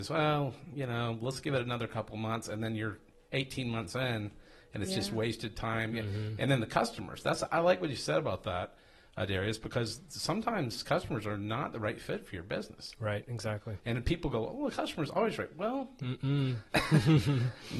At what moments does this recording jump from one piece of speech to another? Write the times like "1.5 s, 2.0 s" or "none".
none